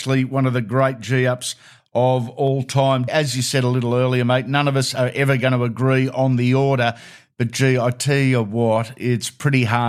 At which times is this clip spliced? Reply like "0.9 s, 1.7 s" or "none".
3.1 s